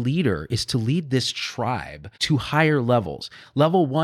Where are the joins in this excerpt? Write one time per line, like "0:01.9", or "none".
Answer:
0:02.1